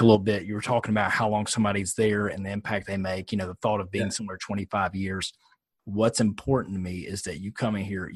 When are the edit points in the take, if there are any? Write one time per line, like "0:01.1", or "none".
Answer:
0:05.8